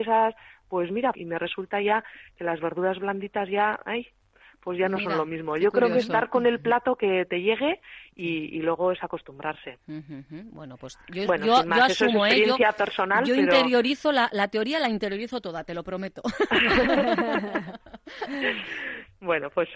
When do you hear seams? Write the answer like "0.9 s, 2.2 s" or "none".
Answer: 1.1 s